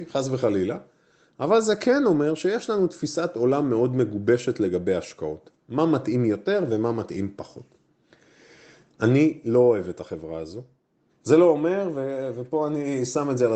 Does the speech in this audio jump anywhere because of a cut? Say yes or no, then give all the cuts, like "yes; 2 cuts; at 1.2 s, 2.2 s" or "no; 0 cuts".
yes; 2 cuts; at 8.9 s, 11.1 s